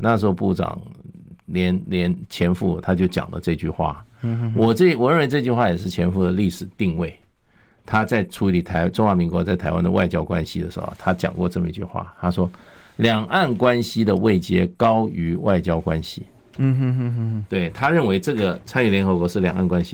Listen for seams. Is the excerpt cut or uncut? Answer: cut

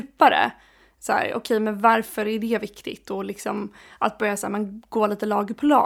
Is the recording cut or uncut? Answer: uncut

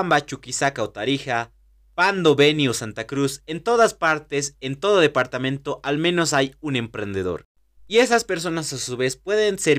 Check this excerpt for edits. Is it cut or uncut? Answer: uncut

